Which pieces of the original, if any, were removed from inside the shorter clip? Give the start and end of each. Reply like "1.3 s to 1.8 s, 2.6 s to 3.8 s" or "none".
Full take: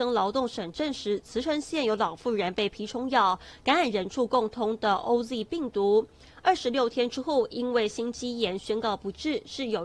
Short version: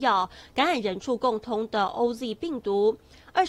none